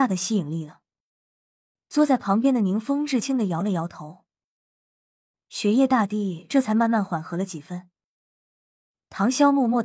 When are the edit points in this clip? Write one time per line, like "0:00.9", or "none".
0:01.8
0:03.2